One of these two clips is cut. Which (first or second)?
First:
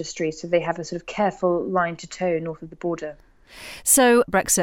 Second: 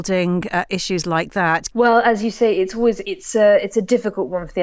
second